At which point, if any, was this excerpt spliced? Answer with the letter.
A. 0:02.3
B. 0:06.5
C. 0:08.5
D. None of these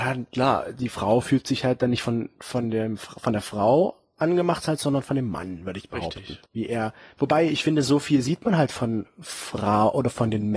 B